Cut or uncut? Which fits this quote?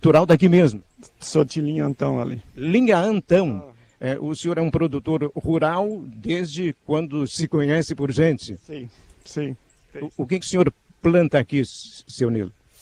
uncut